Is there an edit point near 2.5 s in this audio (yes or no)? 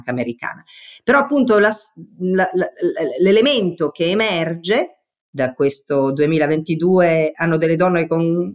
no